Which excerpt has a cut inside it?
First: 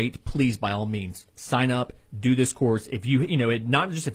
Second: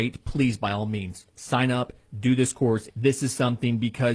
second; 1 cut; at 2.9 s

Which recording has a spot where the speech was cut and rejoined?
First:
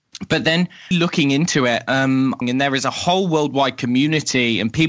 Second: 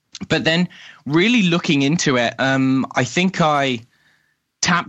first; 2 cuts; at 0.9 s, 2.4 s

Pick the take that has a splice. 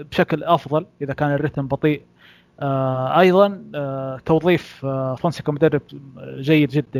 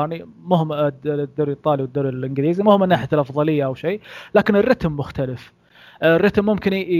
first; 1 cut; at 5.2 s

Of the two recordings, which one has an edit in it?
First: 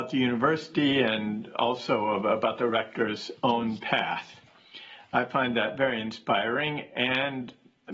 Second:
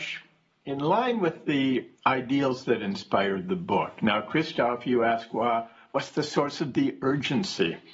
second; 1 cut; at 2.0 s

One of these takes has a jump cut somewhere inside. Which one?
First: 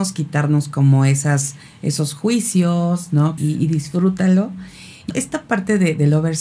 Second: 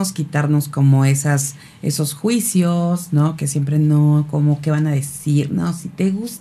first; 2 cuts; at 3.4 s, 5.1 s

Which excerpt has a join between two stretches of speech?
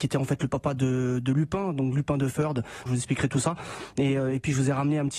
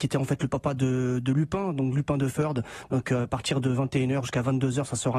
first; 1 cut; at 2.9 s

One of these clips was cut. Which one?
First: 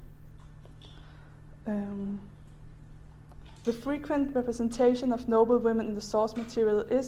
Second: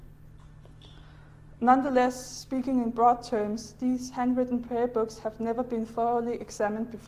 second; 1 cut; at 1.6 s

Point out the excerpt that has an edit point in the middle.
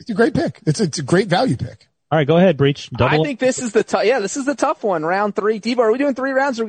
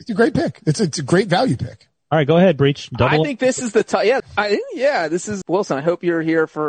second; 2 cuts; at 4.2 s, 5.4 s

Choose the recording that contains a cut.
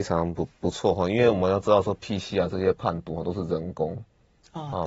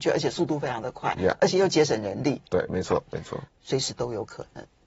second; 1 cut; at 3.5 s

